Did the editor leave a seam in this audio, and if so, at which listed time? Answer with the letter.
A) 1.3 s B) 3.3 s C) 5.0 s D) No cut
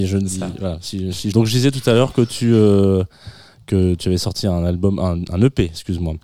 A